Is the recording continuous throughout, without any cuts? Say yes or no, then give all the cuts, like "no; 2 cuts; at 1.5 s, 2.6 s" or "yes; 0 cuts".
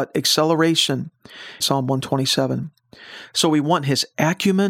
no; 1 cut; at 1.6 s